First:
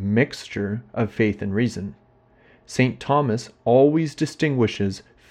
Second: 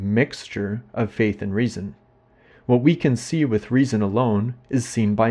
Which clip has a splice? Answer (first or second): second